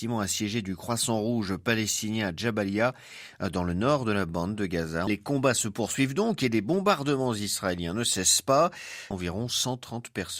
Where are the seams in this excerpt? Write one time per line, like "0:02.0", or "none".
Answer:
0:05.1
0:09.1